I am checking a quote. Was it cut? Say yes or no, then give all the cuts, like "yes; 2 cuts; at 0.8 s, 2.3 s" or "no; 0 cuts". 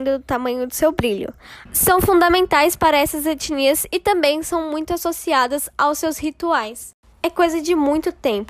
yes; 1 cut; at 1.7 s